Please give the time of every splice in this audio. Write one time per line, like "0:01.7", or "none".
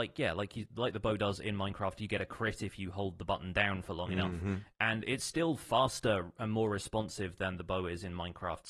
none